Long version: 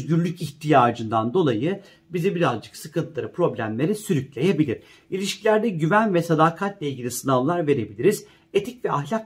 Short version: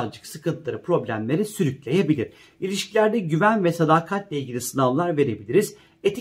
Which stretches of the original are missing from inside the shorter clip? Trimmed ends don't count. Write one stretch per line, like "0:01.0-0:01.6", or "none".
none

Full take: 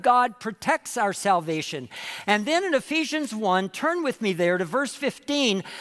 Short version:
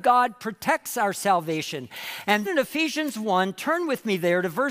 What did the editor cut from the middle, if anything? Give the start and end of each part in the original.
0:02.5-0:02.6

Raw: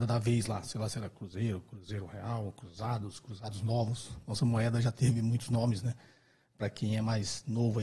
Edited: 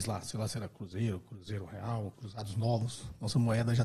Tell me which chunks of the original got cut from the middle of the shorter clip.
0:02.5-0:03.2

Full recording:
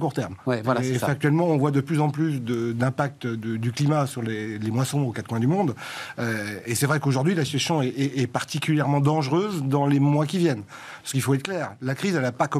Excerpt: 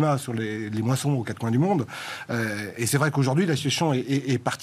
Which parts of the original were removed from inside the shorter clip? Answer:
none

